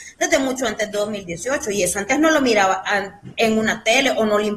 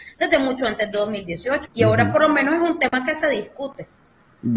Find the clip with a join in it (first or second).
second